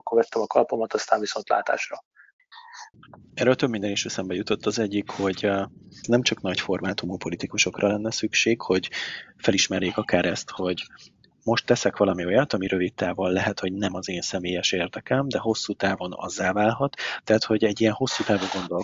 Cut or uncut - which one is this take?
uncut